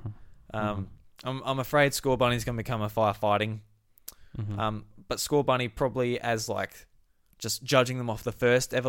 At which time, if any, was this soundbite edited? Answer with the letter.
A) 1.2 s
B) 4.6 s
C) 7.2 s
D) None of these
D